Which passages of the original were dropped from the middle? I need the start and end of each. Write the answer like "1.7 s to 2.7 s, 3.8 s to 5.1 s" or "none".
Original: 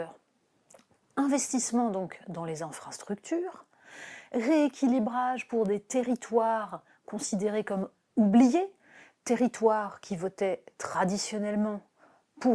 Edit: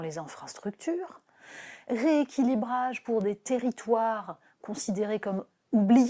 none